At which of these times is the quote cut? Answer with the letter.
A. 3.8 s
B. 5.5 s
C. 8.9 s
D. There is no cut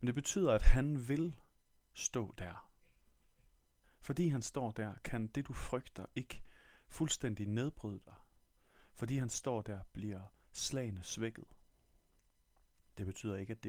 A